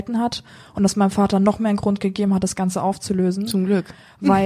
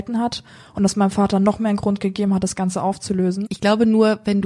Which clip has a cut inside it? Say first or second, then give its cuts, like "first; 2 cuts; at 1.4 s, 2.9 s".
second; 1 cut; at 3.5 s